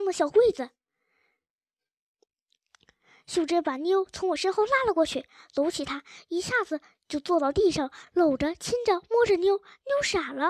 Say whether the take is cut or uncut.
uncut